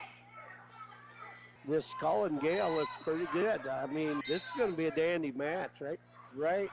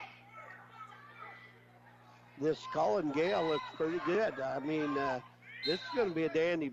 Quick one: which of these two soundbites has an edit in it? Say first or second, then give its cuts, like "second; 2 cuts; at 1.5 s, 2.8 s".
first; 2 cuts; at 1.6 s, 4.2 s